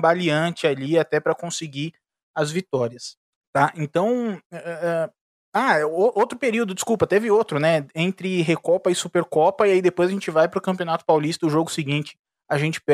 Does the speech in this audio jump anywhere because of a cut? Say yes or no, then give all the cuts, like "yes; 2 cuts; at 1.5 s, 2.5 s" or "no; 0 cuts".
no; 0 cuts